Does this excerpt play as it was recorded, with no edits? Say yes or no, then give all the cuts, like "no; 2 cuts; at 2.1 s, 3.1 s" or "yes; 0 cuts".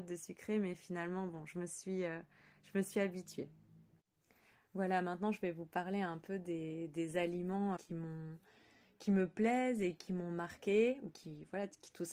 no; 2 cuts; at 7.8 s, 11.1 s